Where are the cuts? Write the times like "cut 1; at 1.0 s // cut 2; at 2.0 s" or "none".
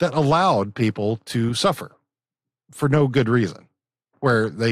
none